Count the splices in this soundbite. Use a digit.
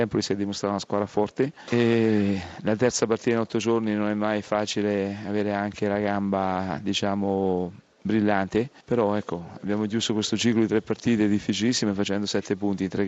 0